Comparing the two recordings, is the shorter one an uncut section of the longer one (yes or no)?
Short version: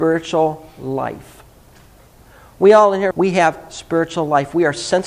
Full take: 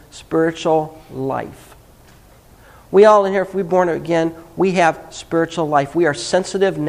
no